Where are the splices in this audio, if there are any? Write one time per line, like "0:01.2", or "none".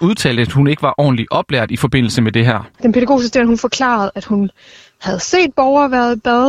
0:02.7